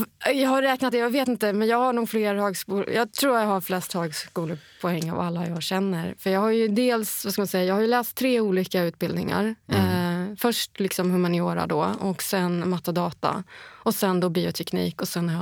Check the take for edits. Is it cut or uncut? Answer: uncut